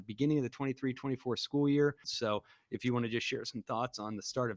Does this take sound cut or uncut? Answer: cut